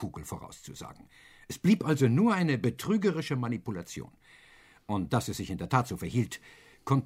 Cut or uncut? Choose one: uncut